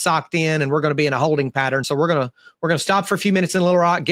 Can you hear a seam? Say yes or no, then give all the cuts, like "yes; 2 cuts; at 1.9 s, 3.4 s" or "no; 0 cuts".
no; 0 cuts